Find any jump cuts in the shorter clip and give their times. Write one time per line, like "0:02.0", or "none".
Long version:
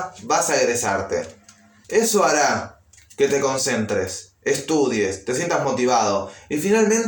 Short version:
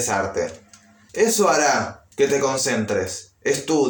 0:02.1